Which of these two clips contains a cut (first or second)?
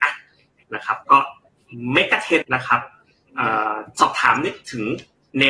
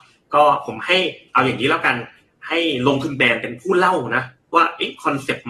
first